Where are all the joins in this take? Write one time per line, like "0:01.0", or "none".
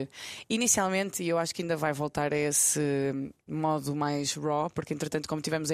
none

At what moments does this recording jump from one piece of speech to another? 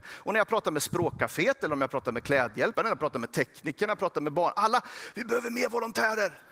0:02.7

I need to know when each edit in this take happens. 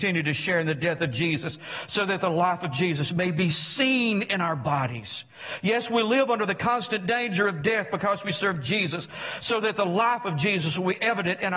none

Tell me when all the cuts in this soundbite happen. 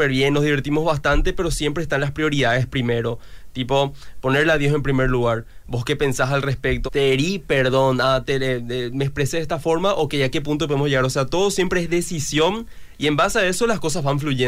0:06.9

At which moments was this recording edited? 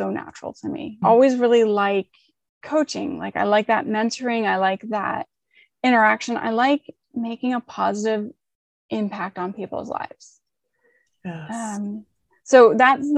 0:01.0

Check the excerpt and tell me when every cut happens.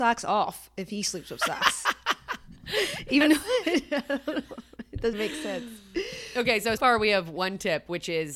0:05.1
0:06.8

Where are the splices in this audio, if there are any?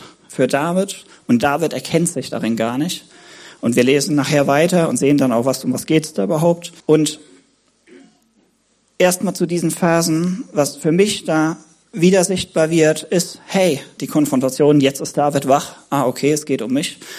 0:06.8
0:14.0

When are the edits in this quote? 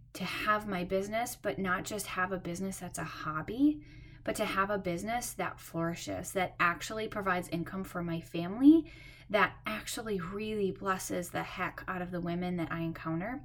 none

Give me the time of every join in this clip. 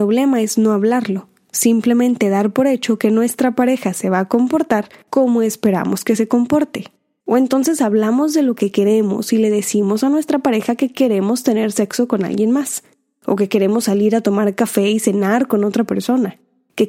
0:07.2

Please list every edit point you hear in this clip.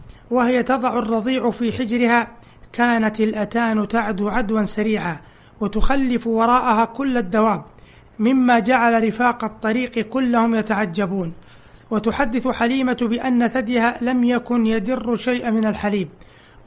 none

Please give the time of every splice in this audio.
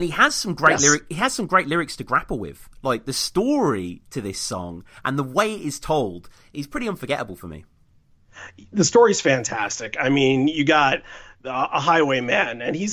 none

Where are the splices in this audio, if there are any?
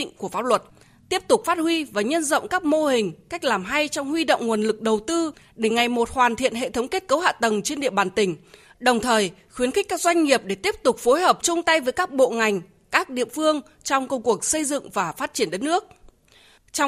none

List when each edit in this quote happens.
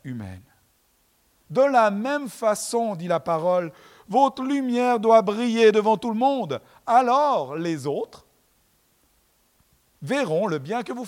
0:01.4

